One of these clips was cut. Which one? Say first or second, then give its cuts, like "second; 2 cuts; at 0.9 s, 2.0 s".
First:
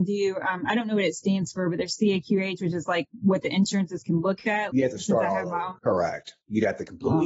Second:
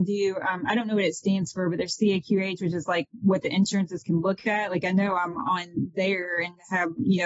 first; 2 cuts; at 4.7 s, 5.8 s